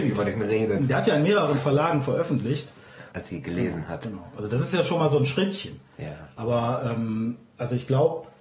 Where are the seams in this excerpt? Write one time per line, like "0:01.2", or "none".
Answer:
0:03.1